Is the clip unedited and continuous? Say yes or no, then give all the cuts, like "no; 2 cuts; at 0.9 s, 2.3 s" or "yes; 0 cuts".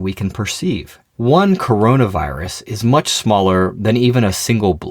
no; 1 cut; at 1.1 s